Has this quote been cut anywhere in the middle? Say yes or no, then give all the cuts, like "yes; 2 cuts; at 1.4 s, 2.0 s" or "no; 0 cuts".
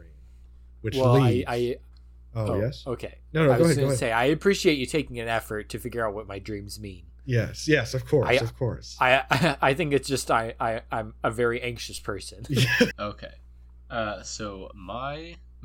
yes; 1 cut; at 12.9 s